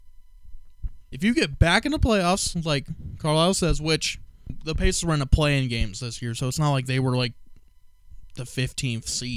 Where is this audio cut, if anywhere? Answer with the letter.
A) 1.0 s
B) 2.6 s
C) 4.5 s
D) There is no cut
A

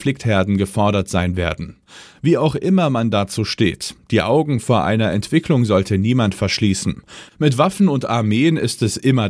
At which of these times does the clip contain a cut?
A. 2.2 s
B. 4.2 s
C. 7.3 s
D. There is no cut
C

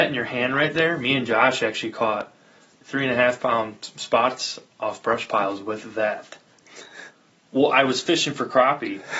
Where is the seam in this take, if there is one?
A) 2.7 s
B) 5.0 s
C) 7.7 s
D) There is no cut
A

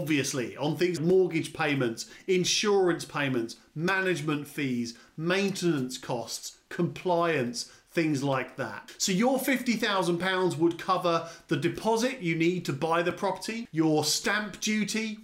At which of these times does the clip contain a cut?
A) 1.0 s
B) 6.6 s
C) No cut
A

